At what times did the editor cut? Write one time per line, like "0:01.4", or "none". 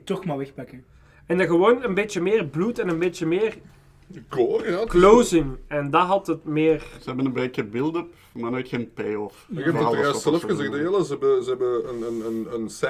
none

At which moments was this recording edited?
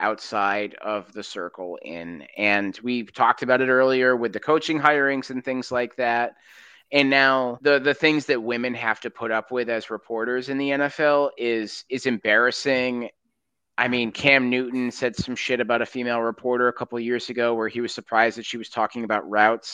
none

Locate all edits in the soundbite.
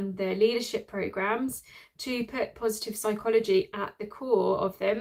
none

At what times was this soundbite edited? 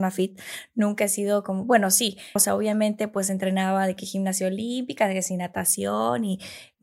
0:02.4

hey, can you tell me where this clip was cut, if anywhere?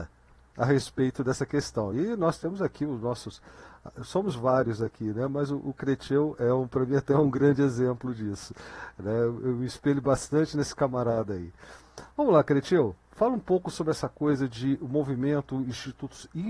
none

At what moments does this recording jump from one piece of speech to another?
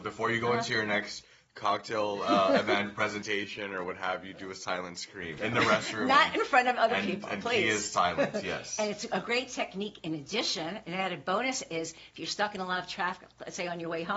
0:05.4

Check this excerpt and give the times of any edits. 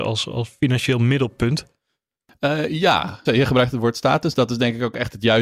0:03.3

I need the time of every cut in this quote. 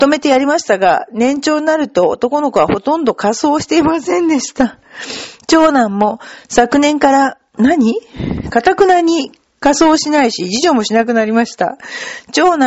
0:07.6

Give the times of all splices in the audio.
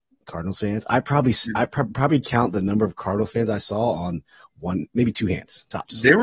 none

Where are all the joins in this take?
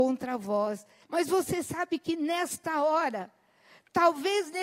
0:01.0

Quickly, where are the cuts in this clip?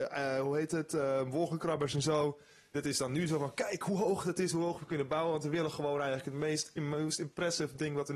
none

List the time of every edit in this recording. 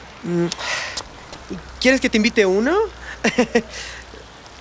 none

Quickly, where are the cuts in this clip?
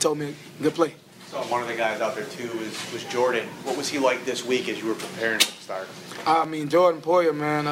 none

